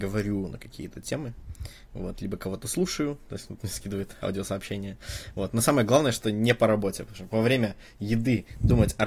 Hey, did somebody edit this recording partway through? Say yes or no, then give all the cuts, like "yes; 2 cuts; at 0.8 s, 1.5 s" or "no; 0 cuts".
no; 0 cuts